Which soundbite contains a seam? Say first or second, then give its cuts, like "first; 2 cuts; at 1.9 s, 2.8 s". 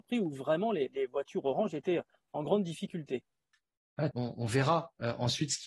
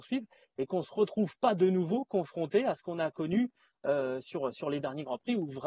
first; 1 cut; at 4.1 s